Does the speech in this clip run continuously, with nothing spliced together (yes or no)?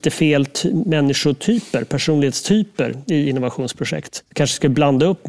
no